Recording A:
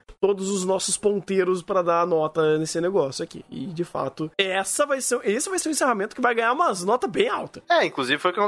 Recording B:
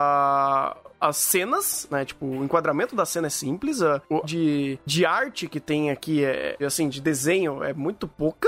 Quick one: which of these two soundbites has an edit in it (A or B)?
B